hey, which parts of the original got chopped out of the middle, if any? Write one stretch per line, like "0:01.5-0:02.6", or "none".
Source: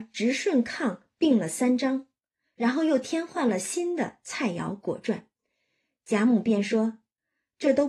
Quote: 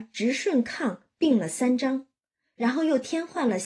none